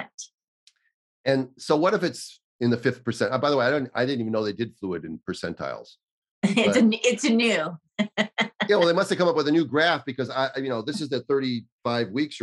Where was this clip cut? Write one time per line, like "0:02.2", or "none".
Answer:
none

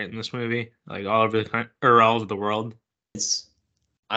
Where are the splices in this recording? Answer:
0:03.1

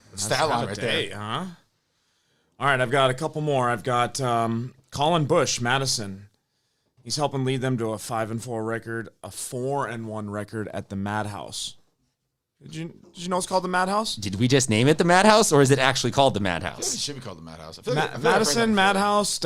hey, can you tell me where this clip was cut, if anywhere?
none

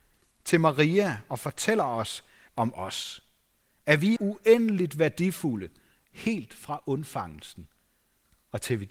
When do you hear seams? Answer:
0:02.5
0:04.2

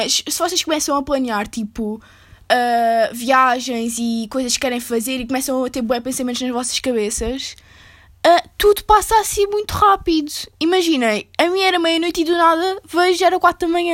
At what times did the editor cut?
none

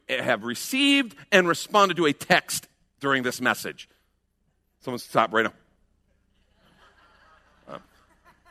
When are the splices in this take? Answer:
none

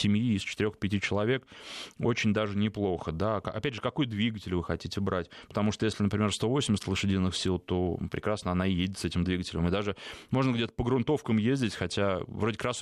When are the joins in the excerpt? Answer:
none

